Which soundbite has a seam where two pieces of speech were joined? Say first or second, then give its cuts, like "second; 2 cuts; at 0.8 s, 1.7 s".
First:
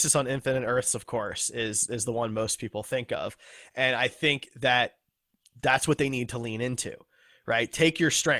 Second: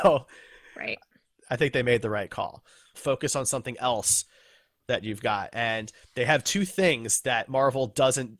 second; 1 cut; at 2.9 s